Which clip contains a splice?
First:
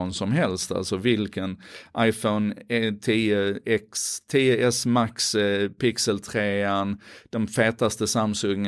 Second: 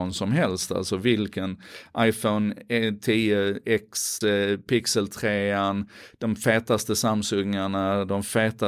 second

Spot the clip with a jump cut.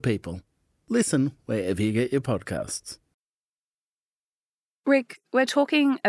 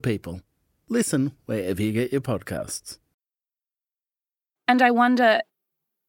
second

